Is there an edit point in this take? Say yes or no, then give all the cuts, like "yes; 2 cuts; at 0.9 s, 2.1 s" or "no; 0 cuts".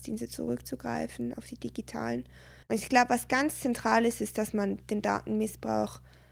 yes; 1 cut; at 2.6 s